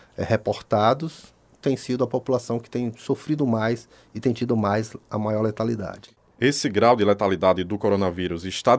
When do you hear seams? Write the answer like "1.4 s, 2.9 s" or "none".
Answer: 6.3 s